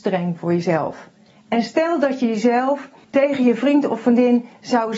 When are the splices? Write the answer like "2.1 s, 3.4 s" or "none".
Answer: 3.0 s